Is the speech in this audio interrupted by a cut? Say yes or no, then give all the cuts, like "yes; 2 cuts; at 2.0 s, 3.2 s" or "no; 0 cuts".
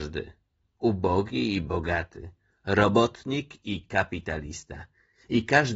no; 0 cuts